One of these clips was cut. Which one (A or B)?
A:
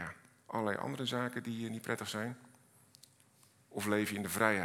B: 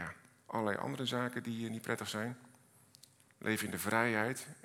B